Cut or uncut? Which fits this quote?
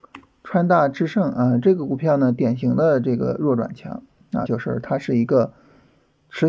cut